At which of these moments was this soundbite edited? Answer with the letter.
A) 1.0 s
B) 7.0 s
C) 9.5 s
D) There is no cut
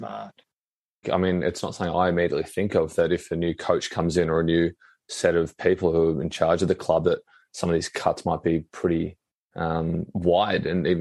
A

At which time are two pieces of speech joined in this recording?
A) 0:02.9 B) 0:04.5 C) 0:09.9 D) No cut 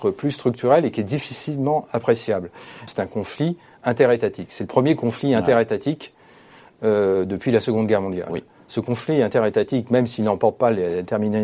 A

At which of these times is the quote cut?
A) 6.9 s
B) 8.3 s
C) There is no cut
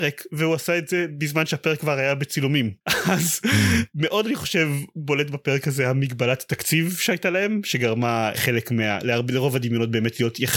B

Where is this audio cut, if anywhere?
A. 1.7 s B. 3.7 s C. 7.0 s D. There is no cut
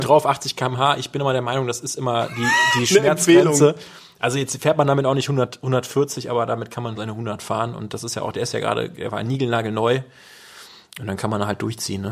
C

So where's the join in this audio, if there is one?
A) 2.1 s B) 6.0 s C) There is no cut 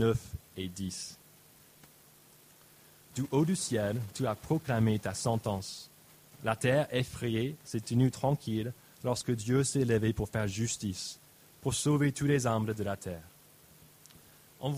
C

